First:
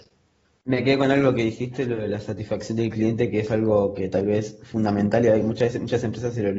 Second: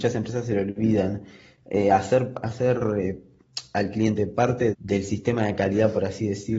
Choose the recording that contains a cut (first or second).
second